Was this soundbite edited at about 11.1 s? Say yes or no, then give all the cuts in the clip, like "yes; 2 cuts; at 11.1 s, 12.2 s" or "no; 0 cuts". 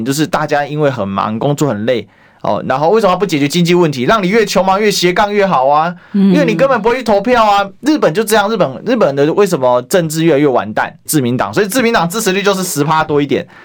yes; 1 cut; at 11.1 s